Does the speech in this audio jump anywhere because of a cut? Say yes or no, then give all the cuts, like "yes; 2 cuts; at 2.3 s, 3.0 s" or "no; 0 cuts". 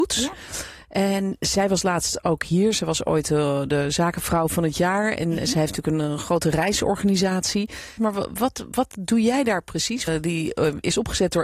yes; 2 cuts; at 8.0 s, 10.1 s